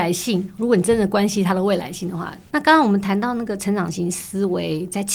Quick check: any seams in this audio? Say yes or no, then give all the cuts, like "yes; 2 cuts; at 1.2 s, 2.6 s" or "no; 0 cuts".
yes; 1 cut; at 2.5 s